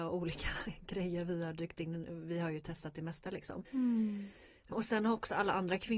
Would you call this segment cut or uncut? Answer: cut